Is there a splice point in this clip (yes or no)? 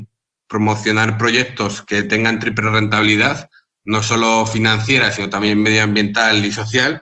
no